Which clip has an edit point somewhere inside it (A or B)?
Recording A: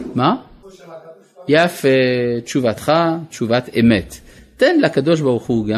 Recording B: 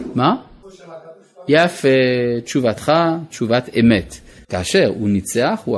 B